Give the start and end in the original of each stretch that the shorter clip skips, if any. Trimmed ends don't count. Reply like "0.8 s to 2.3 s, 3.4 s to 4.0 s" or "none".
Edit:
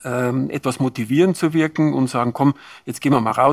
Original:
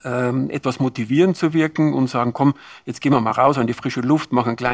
none